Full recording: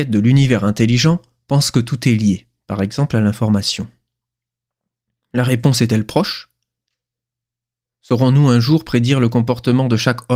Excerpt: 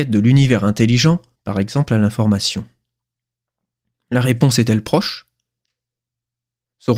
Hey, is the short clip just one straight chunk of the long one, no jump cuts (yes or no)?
no